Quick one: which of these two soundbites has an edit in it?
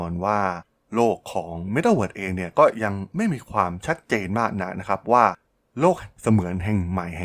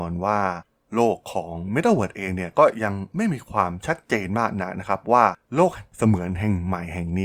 second; 1 cut; at 5.4 s

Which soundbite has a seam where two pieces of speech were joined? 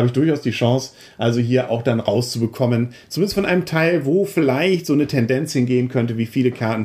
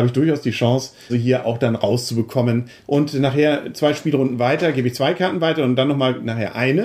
second; 2 cuts; at 1.1 s, 2.8 s

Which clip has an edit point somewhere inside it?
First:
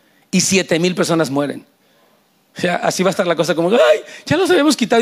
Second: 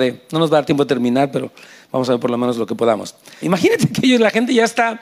second; 1 cut; at 3.4 s

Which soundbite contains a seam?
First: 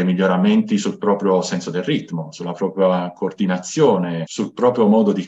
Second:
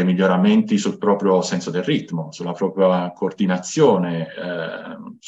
first; 1 cut; at 4.2 s

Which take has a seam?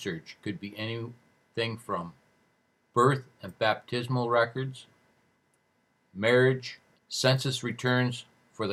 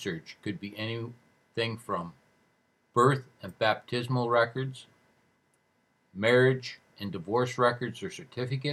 first; 1 cut; at 6.9 s

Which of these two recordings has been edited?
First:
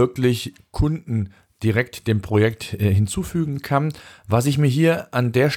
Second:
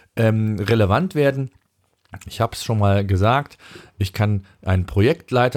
second; 1 cut; at 2.2 s

